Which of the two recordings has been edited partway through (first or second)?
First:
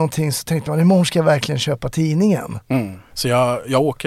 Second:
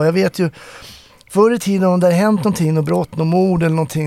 first